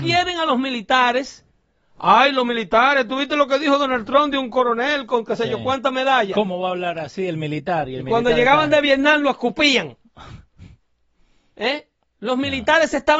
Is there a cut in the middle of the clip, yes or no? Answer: no